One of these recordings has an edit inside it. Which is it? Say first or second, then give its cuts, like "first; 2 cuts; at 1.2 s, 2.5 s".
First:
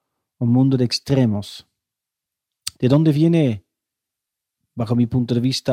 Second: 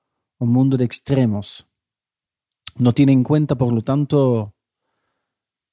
first; 1 cut; at 2.7 s